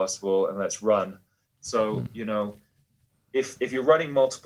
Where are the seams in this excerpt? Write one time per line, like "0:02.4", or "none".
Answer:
0:01.5